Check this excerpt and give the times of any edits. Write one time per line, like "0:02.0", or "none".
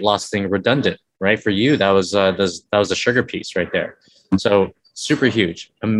none